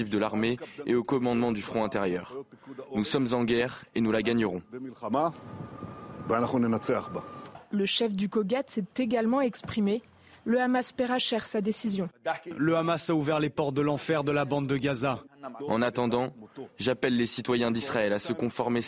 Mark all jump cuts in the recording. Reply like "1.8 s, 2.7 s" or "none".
15.6 s